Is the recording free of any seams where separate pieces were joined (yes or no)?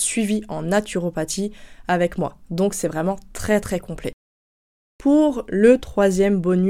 yes